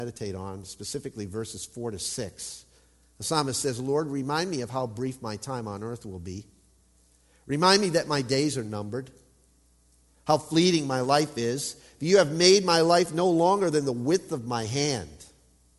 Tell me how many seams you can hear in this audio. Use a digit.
0